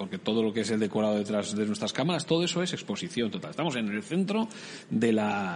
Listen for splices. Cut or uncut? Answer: uncut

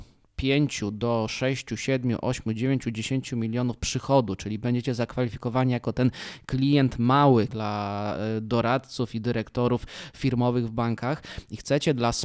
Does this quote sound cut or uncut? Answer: cut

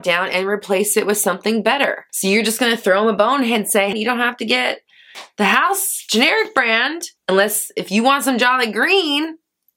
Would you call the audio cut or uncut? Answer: cut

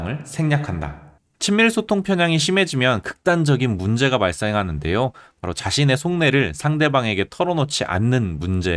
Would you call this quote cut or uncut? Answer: uncut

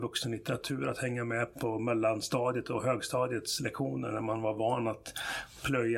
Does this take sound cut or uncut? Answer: cut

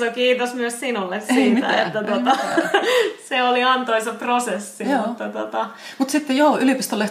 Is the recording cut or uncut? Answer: uncut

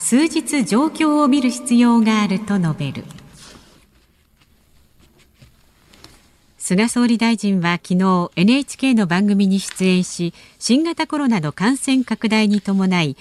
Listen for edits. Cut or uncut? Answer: uncut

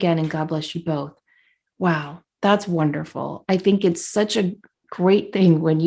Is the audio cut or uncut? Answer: uncut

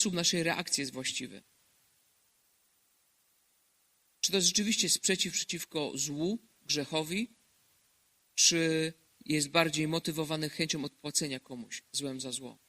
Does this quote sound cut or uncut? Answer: uncut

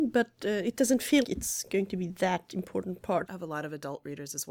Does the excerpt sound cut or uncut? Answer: cut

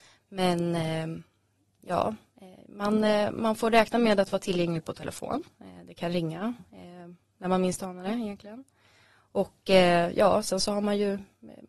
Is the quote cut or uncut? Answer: uncut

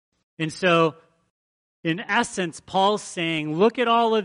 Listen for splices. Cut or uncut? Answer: uncut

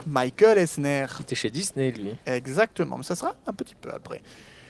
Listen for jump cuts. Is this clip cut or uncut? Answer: uncut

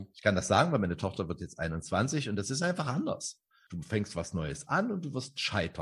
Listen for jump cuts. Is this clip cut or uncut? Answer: cut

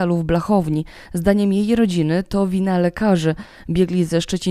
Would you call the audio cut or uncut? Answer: uncut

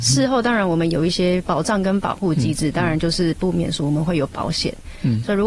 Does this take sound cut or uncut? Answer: uncut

